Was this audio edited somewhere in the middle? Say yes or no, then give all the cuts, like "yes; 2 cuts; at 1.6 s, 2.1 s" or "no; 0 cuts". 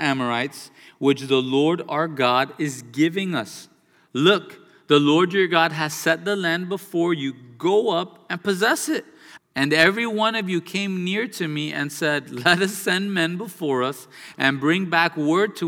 yes; 2 cuts; at 9.4 s, 14.3 s